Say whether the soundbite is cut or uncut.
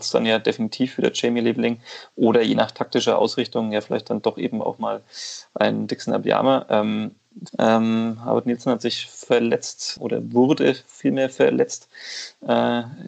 cut